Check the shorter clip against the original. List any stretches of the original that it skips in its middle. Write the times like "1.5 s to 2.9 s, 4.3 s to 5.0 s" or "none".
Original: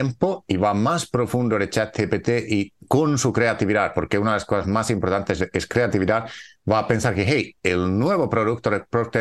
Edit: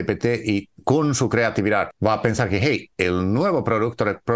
3.9 s to 6.6 s